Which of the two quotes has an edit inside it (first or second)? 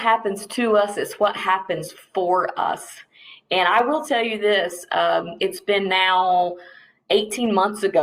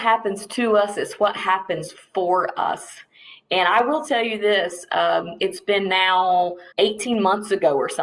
second